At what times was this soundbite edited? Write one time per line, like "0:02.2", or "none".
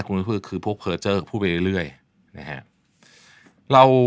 none

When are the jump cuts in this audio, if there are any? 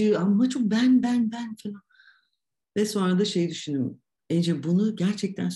none

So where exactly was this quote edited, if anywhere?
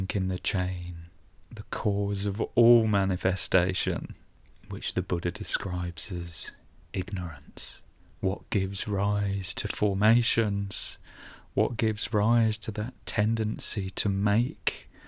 none

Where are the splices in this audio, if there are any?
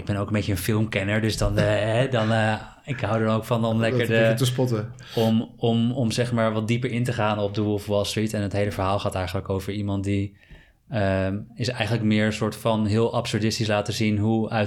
none

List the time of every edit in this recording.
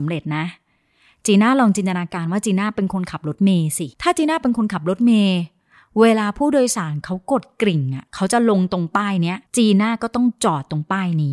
0:03.9
0:09.5

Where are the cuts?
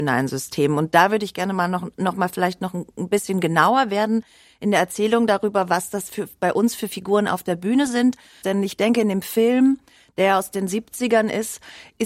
0:08.4

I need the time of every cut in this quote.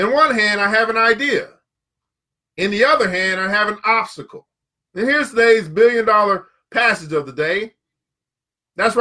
0:04.9

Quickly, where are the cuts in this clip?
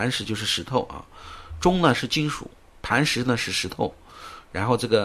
0:02.6

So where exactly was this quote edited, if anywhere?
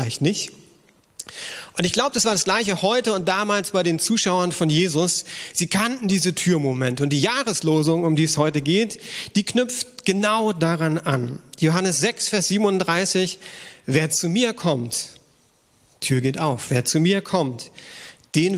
none

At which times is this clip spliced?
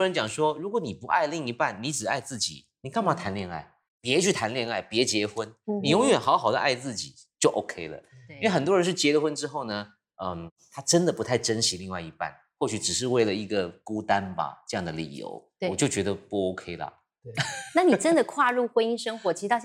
0:03.8

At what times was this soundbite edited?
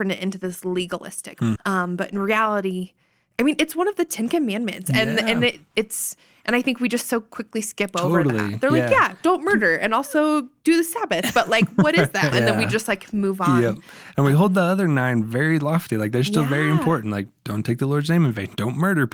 0:01.6
0:12.3

